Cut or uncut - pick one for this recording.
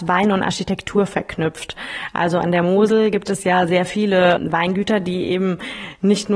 uncut